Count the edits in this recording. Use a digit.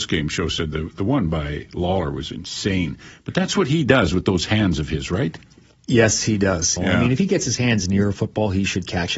1